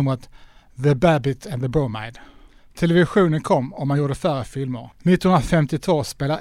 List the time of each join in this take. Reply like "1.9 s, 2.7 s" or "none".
4.9 s